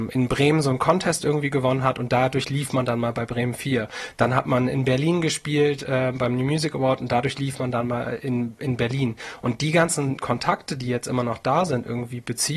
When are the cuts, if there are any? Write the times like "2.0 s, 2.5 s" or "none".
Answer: none